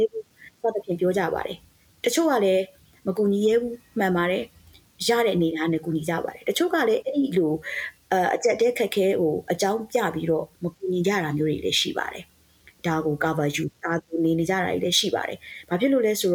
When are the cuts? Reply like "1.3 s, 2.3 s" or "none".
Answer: 13.8 s